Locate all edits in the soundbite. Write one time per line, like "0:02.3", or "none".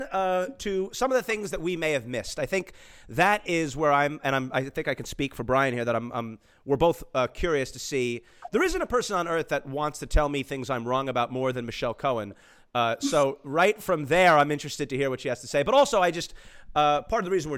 none